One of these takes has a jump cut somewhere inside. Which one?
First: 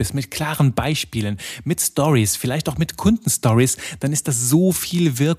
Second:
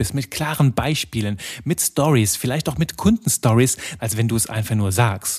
second; 1 cut; at 4.0 s

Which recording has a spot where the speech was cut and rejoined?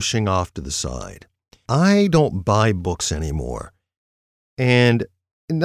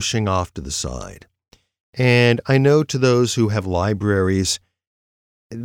first; 1 cut; at 1.7 s

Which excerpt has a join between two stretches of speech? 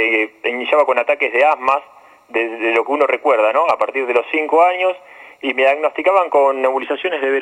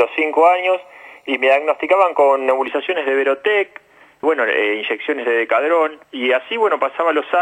second; 2 cuts; at 4.2 s, 6.0 s

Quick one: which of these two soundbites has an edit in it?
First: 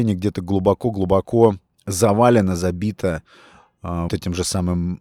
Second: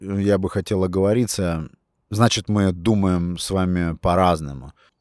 first; 1 cut; at 4.1 s

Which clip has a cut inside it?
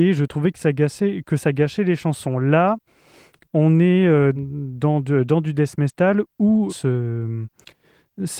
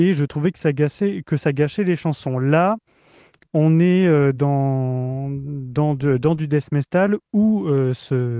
first; 2 cuts; at 4.4 s, 6.7 s

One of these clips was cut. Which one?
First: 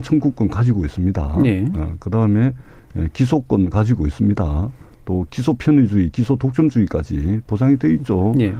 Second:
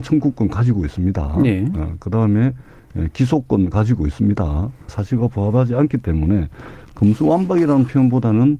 second; 1 cut; at 4.9 s

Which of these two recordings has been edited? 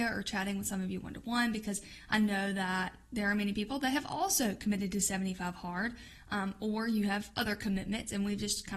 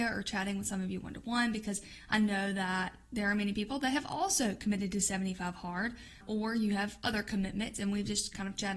second; 1 cut; at 6.2 s

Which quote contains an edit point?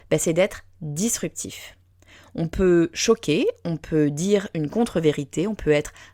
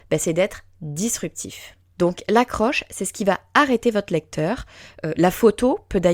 second; 1 cut; at 1.9 s

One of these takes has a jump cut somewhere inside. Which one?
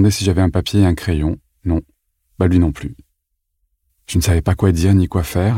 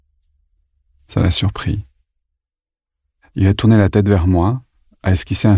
first; 1 cut; at 3.9 s

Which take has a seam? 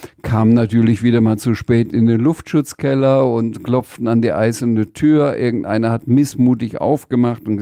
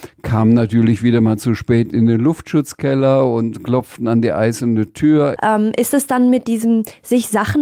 second; 1 cut; at 5.4 s

